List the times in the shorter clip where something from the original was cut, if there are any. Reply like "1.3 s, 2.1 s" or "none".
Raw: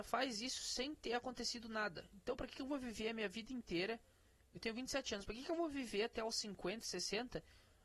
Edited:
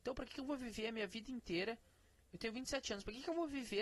none